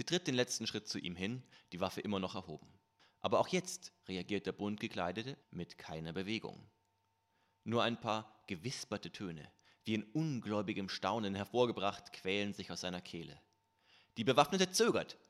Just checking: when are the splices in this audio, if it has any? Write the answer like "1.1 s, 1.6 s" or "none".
5.4 s